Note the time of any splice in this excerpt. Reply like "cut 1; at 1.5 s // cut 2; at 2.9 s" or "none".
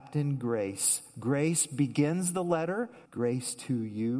cut 1; at 3.0 s